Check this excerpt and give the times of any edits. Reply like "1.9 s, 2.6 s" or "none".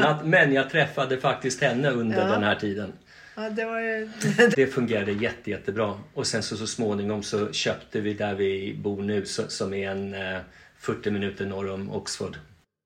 4.5 s